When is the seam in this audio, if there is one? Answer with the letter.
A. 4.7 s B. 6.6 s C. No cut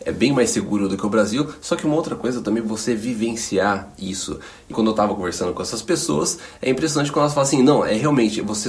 A